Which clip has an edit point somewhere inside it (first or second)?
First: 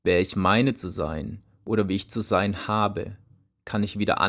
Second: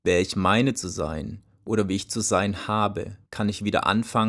second